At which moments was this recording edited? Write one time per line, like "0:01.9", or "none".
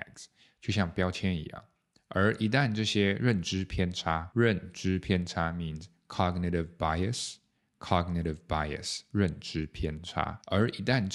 none